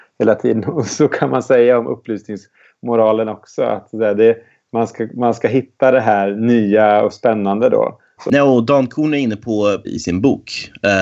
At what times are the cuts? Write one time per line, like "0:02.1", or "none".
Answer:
0:08.2
0:09.8